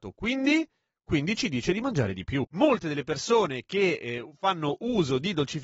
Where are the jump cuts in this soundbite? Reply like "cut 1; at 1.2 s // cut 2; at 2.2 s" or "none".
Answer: none